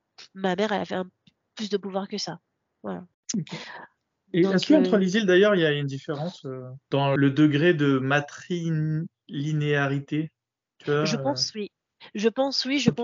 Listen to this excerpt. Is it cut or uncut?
uncut